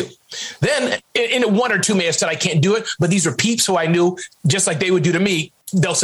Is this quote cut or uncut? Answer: uncut